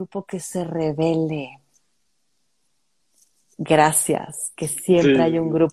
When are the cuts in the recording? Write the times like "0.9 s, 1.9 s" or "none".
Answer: none